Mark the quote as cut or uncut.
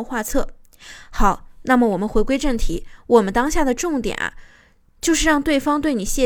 uncut